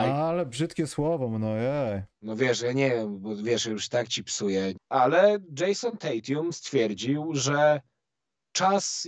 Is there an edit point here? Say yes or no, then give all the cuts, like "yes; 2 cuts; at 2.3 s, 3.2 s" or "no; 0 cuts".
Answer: yes; 1 cut; at 4.7 s